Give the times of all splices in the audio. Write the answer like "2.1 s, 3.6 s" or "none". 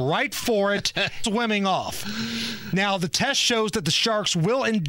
1.2 s

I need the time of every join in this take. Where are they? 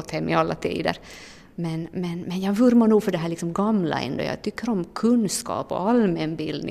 none

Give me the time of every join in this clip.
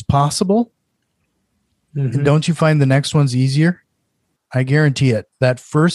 4.4 s

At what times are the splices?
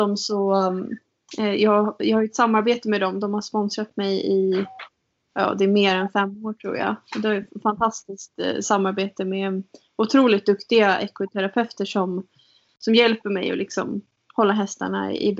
none

